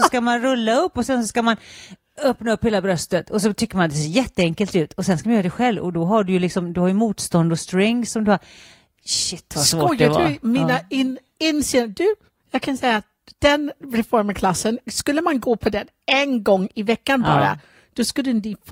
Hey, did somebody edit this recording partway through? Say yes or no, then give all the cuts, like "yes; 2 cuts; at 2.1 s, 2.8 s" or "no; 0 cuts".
no; 0 cuts